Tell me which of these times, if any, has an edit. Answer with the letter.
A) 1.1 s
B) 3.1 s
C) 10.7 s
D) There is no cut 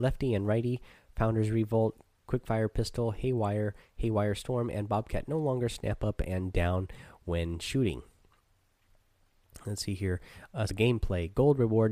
C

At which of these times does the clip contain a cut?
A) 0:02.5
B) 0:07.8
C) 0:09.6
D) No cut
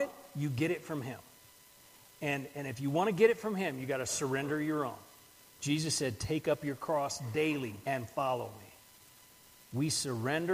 B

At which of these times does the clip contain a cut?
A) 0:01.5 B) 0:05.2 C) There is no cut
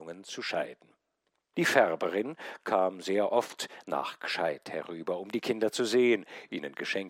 A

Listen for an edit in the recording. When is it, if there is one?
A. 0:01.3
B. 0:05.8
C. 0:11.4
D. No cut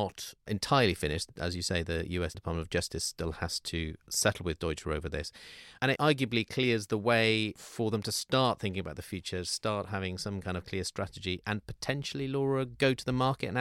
B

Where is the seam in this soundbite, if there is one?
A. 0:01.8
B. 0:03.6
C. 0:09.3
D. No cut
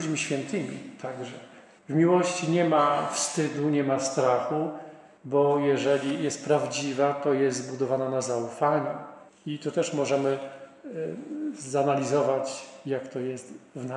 A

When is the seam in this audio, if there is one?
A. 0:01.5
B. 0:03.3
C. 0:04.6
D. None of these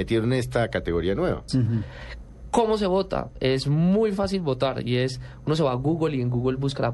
A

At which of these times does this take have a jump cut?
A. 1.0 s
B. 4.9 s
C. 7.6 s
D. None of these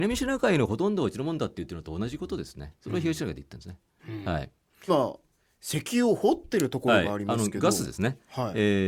B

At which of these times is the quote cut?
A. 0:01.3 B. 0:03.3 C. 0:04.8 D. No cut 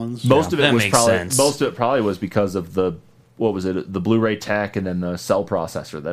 D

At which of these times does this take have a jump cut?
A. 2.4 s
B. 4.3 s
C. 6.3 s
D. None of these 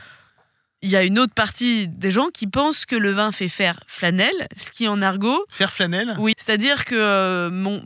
C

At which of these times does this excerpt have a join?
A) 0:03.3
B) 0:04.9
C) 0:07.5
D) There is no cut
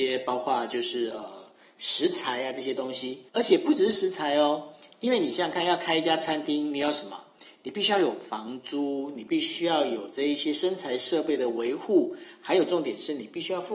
A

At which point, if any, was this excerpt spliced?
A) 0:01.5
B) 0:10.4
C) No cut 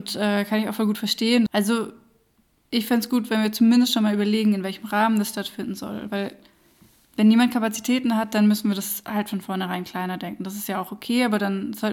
A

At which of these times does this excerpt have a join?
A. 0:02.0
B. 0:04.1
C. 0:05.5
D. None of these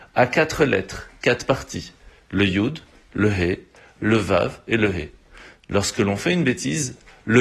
D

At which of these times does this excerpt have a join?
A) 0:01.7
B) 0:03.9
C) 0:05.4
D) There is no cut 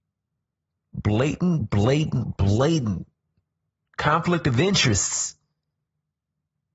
D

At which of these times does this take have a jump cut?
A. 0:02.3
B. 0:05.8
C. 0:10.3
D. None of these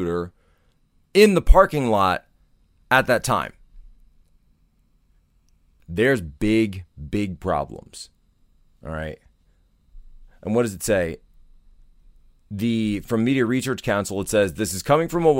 B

